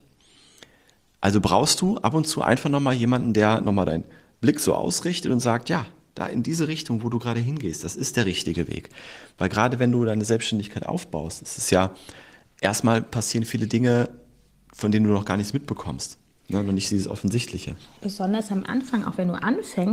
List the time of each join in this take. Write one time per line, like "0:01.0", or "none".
none